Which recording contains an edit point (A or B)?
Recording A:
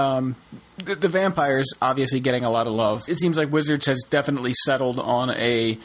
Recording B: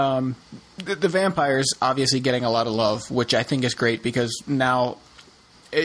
A